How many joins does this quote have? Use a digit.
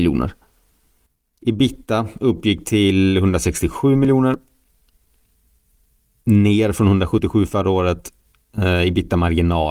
0